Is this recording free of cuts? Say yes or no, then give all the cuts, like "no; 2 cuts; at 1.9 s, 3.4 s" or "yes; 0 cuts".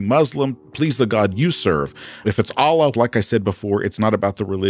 no; 1 cut; at 2.9 s